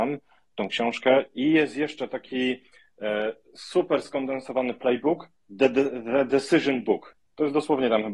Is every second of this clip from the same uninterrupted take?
yes; 0 cuts

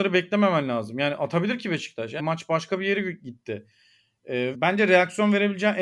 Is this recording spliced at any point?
yes; 2 cuts; at 2.2 s, 4.5 s

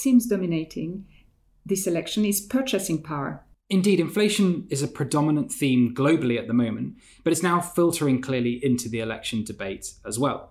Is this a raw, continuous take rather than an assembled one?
no; 1 cut; at 3.5 s

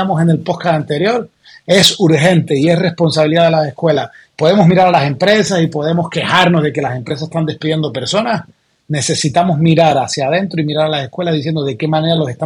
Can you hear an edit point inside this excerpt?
no; 0 cuts

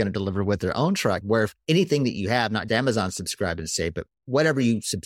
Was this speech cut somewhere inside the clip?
yes; 2 cuts; at 1.2 s, 2.7 s

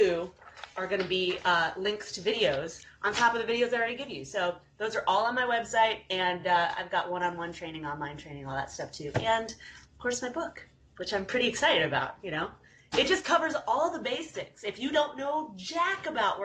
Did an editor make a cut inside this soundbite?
no; 0 cuts

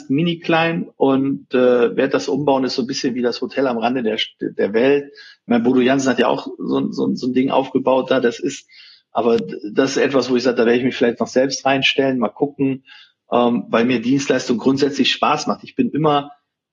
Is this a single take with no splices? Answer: yes; 0 cuts

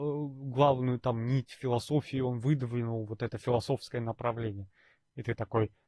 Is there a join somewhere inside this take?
no; 0 cuts

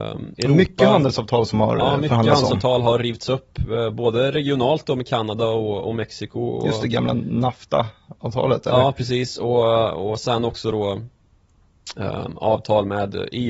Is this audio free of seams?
yes; 0 cuts

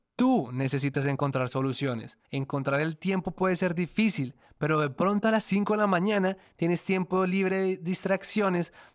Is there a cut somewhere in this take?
yes; 1 cut; at 2.2 s

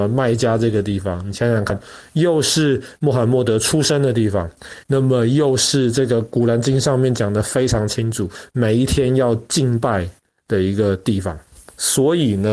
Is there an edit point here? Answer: yes; 1 cut; at 4.8 s

